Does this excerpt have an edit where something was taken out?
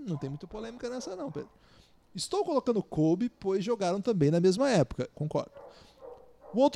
yes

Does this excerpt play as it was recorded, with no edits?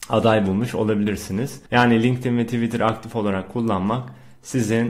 no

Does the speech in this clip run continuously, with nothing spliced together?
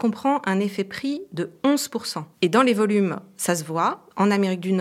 no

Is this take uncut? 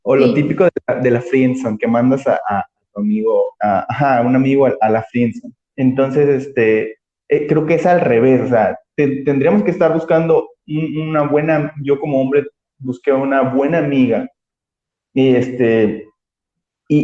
no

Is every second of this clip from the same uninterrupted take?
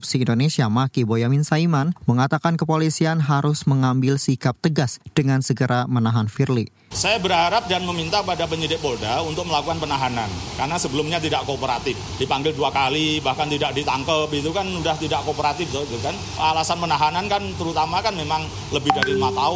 no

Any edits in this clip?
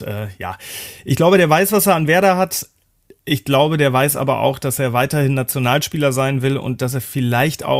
no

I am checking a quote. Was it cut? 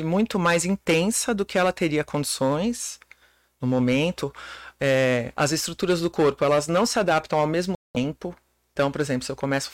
no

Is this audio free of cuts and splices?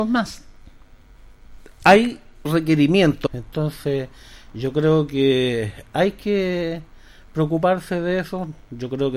no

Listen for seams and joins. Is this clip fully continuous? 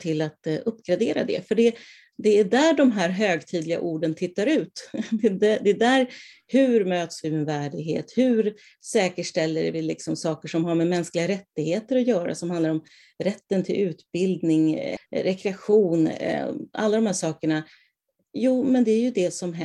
no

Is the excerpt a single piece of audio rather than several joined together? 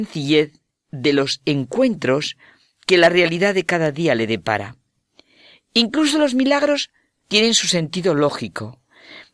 yes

